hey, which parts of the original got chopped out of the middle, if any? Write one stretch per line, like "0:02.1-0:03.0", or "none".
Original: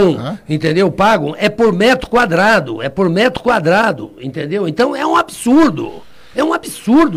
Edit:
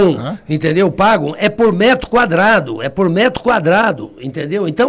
none